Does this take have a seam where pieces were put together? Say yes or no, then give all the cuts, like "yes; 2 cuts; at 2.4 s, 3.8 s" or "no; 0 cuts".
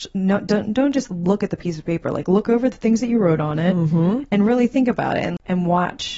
no; 0 cuts